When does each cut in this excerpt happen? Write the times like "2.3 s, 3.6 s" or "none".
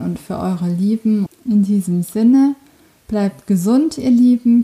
1.3 s